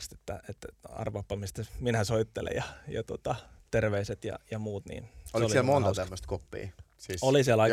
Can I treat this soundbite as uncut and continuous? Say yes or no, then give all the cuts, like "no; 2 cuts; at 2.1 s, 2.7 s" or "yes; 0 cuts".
yes; 0 cuts